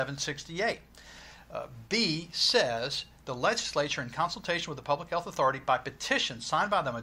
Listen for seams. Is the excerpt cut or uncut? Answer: uncut